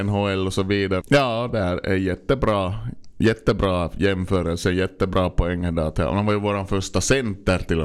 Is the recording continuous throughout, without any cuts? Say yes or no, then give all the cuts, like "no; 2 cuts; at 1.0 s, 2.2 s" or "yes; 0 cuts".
no; 1 cut; at 1.0 s